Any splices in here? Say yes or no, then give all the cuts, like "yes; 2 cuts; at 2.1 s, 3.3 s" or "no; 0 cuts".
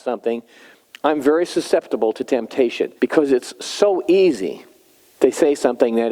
yes; 1 cut; at 3.0 s